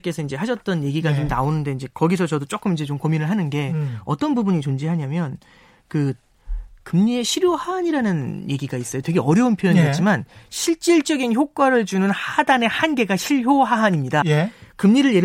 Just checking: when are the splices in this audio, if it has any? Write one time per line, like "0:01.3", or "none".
0:14.2